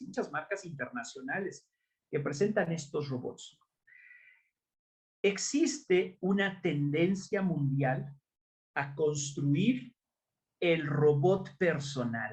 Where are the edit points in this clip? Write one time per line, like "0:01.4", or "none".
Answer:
none